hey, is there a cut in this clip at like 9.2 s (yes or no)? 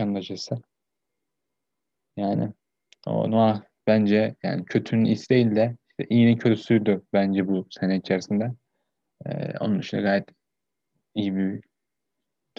no